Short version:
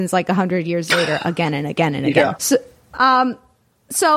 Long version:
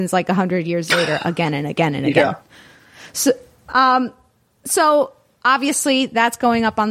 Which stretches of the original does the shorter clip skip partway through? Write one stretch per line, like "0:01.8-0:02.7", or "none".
0:02.3-0:03.1